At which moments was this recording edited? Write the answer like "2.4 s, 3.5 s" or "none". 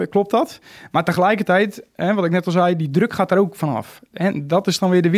none